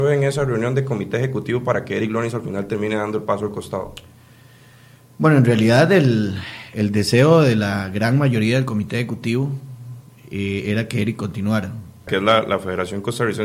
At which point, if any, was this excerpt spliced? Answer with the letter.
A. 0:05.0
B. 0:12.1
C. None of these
B